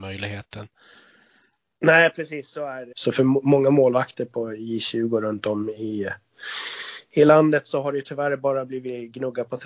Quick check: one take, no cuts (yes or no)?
no